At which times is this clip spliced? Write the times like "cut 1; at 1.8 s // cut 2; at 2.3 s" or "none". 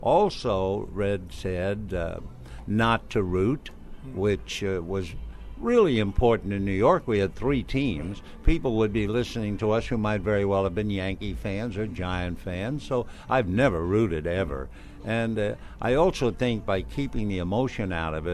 none